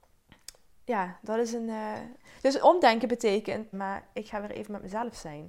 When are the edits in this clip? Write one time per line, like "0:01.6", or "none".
0:03.7